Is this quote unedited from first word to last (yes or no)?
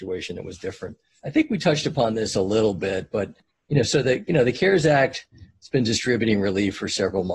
yes